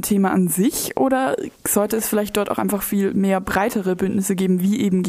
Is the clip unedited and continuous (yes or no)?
yes